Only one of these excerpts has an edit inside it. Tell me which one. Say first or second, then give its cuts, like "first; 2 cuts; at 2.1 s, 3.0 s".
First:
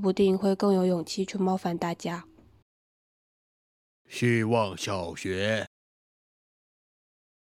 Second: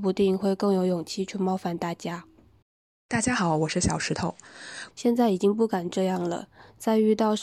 second; 2 cuts; at 3.0 s, 4.9 s